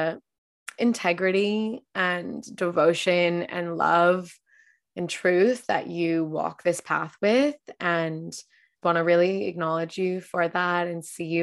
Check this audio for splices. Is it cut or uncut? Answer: cut